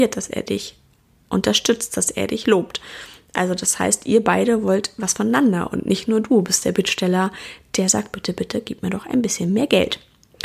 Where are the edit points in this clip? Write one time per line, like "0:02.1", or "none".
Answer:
none